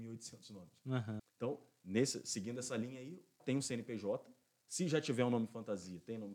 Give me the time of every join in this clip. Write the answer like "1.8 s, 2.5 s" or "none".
1.2 s, 3.4 s